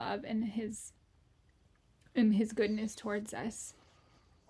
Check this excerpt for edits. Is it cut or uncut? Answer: uncut